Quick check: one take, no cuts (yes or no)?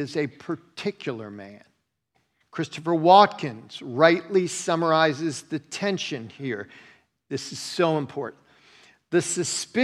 yes